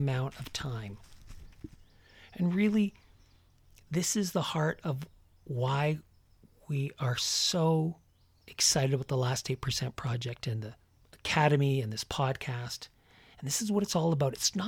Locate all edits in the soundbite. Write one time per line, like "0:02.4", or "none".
none